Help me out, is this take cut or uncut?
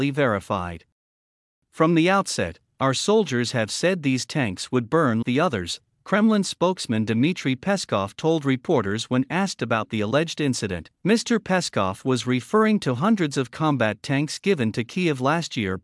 cut